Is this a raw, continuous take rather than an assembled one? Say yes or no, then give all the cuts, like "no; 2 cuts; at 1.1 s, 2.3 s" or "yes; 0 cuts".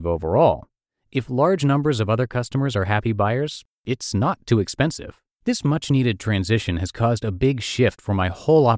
no; 1 cut; at 5.4 s